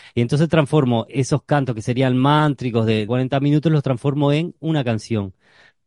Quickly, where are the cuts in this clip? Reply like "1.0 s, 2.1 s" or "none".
1.1 s, 3.1 s